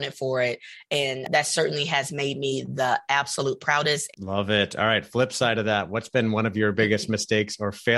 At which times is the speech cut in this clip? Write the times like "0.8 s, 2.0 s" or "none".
4.1 s